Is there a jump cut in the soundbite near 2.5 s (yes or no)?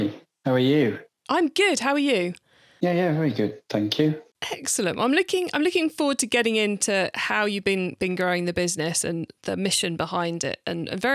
no